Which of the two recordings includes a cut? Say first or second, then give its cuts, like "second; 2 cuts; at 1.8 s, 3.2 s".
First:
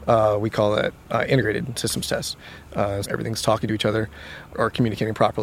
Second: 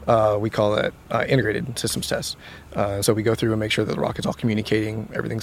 first; 2 cuts; at 3.0 s, 4.5 s